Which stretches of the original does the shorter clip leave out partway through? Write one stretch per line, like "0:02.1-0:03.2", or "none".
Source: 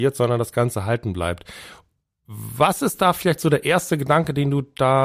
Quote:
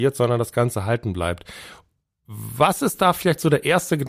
none

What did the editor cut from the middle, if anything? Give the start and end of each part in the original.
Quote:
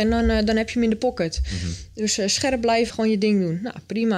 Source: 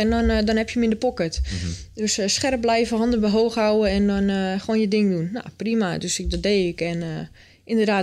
0:02.9-0:04.6

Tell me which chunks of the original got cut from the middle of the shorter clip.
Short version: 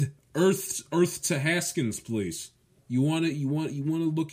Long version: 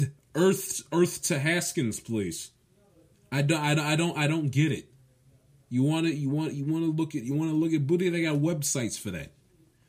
0:02.8-0:05.6

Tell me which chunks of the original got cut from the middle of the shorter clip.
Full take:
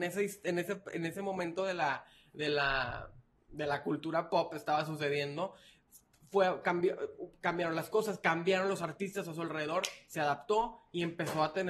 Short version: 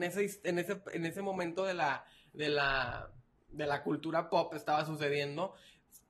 none

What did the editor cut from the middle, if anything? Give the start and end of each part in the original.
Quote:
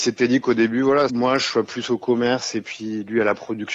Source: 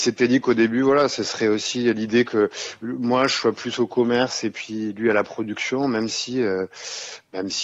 0:01.1-0:03.0

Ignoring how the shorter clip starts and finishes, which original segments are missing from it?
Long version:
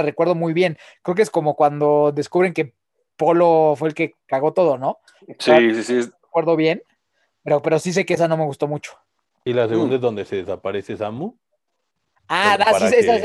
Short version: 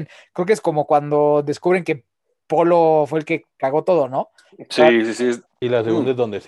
0:06.2-0:09.3

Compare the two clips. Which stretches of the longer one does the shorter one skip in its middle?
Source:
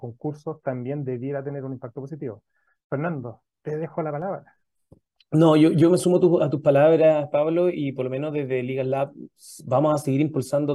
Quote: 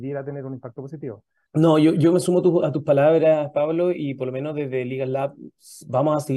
0:02.6-0:05.2

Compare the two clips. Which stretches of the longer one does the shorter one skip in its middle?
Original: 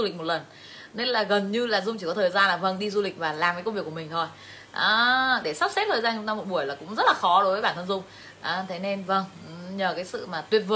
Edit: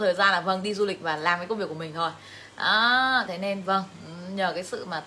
0:05.4-0:08.7

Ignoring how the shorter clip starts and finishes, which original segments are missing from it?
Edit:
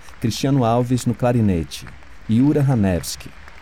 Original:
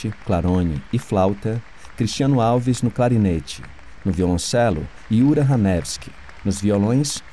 0:04.0-0:05.1

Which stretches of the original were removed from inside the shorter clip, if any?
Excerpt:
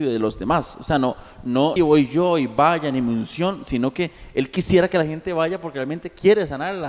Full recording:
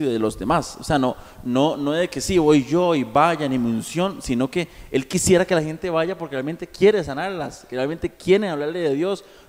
0:01.8-0:02.3

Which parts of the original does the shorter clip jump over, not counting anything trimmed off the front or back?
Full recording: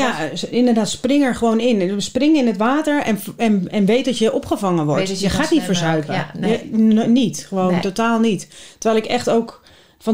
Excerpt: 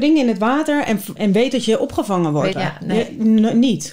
0:03.3-0:03.7
0:05.1-0:06.1

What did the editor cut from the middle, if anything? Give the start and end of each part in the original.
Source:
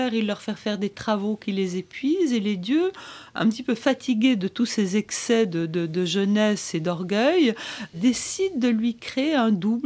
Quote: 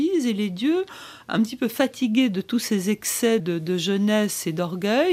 0:05.5-0:05.7

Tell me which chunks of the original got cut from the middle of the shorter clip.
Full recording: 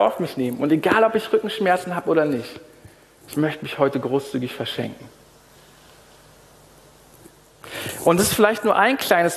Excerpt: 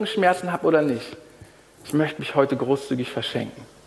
none

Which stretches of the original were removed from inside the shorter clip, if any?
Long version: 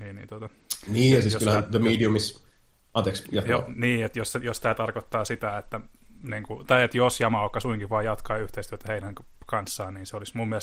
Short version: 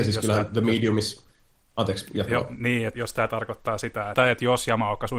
0:04.1-0:04.4
0:05.6-0:06.7

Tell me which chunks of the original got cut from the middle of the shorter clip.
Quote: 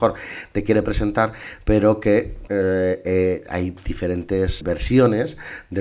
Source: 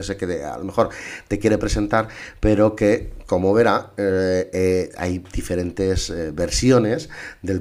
0:03.2-0:04.0
0:06.1-0:06.3

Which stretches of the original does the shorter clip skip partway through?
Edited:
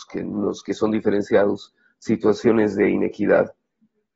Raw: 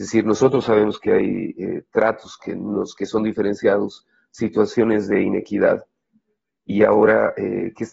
none

